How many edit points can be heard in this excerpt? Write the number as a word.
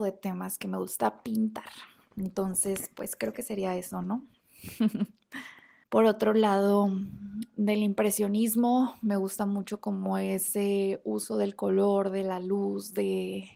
one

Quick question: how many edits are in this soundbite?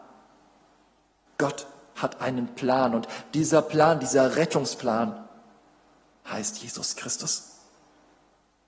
zero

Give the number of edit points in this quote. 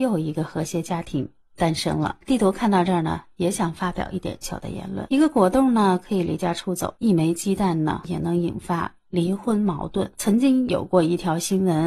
one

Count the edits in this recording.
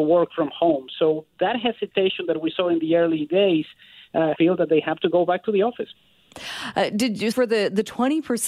two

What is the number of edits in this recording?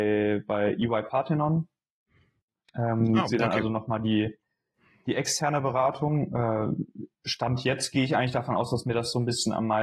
zero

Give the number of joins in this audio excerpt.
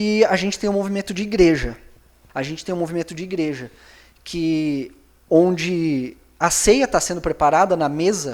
one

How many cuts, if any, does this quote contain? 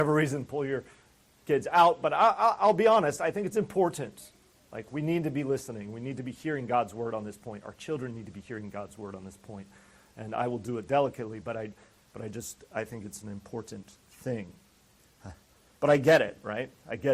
zero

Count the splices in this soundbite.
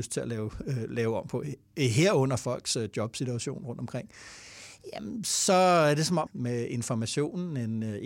one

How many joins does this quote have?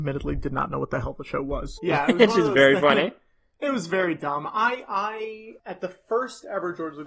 one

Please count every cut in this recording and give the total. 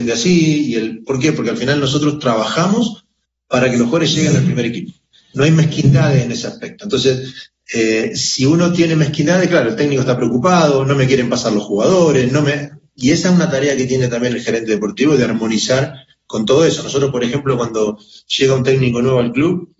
zero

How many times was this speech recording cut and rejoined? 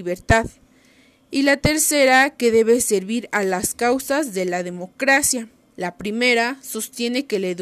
one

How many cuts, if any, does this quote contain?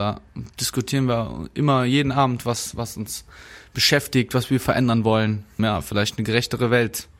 one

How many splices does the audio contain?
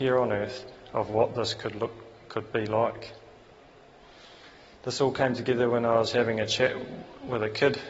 zero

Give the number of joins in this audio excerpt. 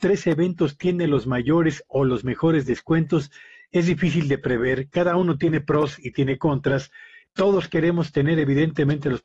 one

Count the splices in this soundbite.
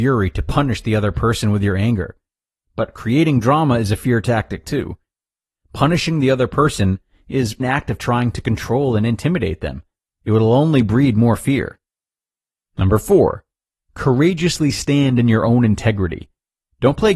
one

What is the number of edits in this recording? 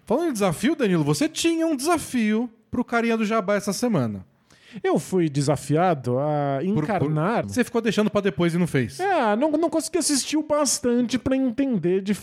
one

